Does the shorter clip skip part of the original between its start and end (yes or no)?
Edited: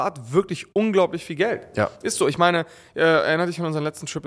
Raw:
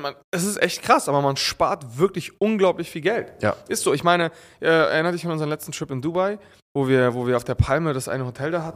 no